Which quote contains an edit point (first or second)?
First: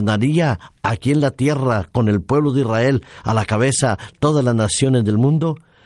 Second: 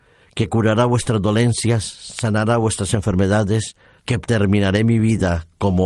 second